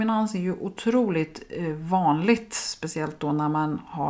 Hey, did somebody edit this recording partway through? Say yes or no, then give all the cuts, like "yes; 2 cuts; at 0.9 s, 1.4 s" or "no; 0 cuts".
no; 0 cuts